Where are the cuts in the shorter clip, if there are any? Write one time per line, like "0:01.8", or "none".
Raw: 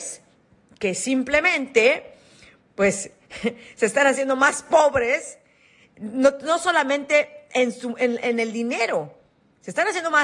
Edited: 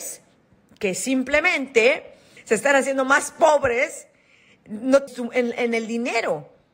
0:02.4
0:05.1